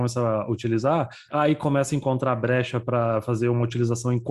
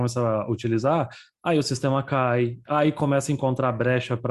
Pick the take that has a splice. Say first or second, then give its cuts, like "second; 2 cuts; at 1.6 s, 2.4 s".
first; 1 cut; at 1.3 s